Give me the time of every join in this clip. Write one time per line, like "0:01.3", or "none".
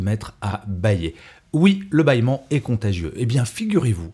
none